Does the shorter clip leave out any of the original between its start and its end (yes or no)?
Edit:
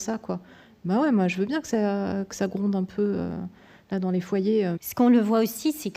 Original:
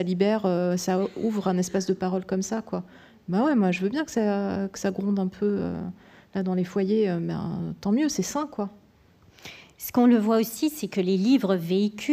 yes